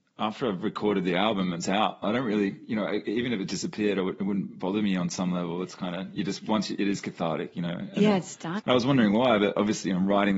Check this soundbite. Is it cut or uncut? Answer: cut